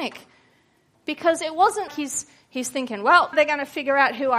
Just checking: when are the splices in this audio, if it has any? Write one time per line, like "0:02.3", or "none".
0:01.9
0:03.3